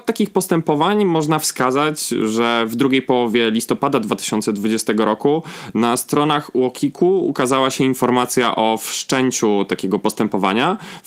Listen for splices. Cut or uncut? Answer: uncut